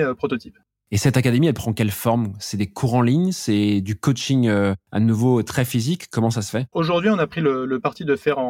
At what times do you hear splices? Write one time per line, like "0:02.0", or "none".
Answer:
0:06.7